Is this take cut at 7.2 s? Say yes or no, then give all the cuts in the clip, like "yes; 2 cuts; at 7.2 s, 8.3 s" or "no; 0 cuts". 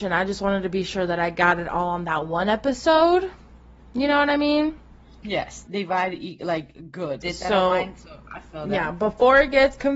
yes; 2 cuts; at 5.7 s, 7.2 s